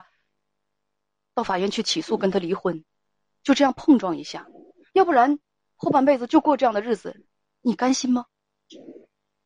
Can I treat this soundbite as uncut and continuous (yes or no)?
yes